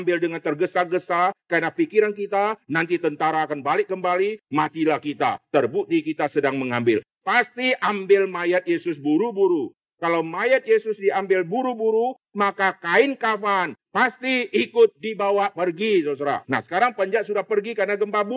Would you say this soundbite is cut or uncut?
cut